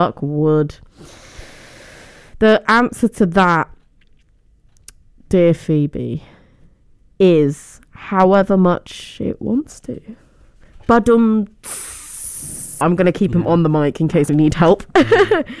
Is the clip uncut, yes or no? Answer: no